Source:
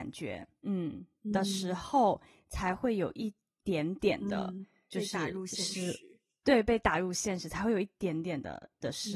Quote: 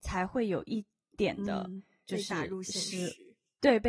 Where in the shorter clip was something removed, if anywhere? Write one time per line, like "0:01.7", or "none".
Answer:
0:01.1